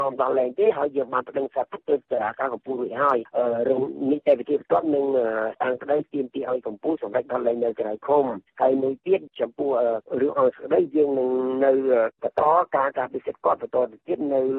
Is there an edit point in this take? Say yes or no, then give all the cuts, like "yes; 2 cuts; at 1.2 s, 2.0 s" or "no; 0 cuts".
yes; 1 cut; at 5.6 s